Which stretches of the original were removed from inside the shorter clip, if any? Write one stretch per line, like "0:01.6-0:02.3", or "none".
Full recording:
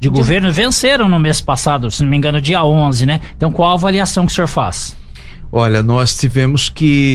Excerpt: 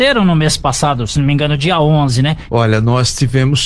0:03.3-0:05.5